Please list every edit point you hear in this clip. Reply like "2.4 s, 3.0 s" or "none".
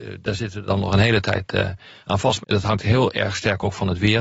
2.4 s